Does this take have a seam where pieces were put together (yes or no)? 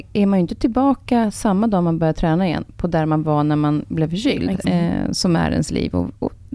yes